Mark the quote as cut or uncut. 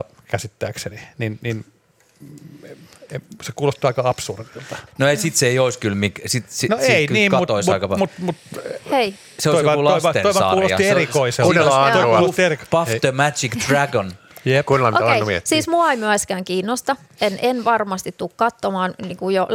cut